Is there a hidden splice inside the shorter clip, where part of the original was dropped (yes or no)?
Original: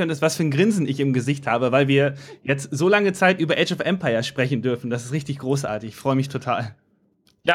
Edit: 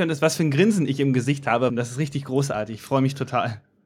yes